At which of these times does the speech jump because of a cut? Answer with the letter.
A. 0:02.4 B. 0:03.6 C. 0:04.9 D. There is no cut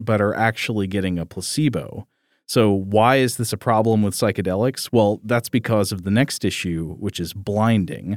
D